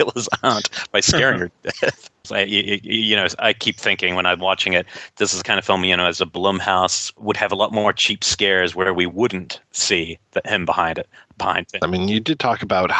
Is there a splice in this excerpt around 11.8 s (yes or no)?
yes